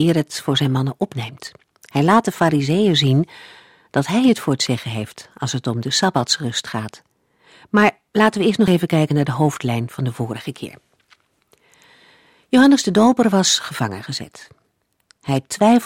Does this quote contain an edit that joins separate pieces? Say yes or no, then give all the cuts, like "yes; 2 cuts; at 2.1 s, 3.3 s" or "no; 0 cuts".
no; 0 cuts